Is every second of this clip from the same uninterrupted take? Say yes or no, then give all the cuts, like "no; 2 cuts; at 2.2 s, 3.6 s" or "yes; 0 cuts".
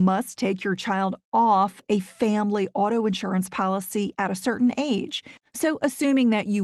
no; 1 cut; at 5.4 s